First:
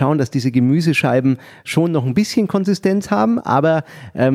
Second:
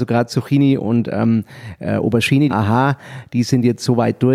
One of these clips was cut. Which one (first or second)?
second